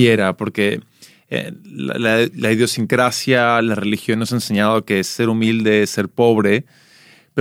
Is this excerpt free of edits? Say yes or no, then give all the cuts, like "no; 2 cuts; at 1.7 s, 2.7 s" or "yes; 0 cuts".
yes; 0 cuts